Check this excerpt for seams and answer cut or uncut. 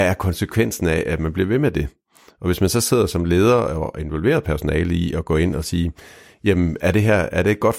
uncut